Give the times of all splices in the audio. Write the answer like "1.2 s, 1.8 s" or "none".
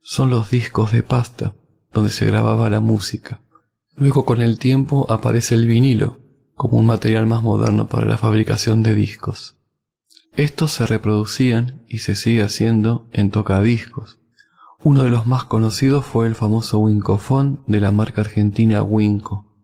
none